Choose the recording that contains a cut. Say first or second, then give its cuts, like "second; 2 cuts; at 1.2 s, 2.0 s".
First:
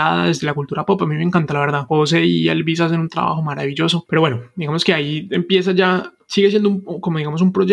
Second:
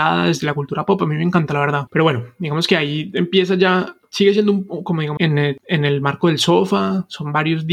second; 2 cuts; at 1.9 s, 5.2 s